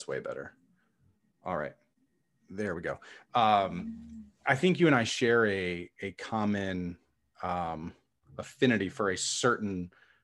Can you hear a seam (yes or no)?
no